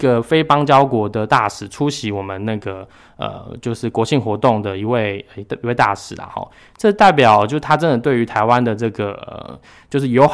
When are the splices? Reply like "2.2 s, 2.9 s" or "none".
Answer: none